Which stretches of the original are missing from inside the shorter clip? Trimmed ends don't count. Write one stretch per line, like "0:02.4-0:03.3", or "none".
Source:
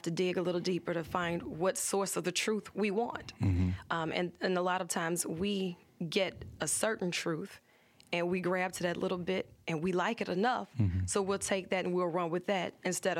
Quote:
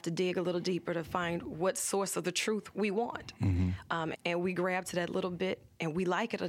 0:04.1-0:08.0